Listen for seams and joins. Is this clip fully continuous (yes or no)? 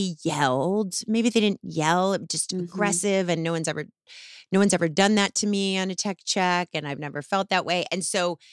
yes